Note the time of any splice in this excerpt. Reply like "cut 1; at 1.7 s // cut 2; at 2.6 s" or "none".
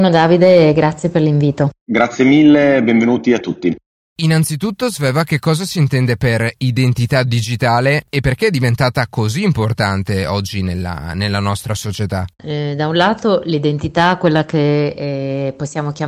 cut 1; at 12.4 s